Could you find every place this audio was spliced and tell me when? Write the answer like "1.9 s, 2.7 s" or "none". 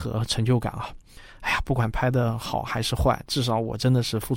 none